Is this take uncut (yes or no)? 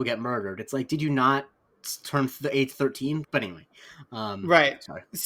no